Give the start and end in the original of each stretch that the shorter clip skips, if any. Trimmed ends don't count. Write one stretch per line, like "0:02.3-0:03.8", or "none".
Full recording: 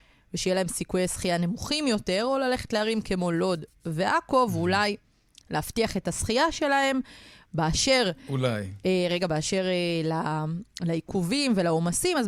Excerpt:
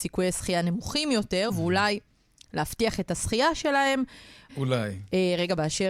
0:02.2-0:04.5
0:07.5-0:08.2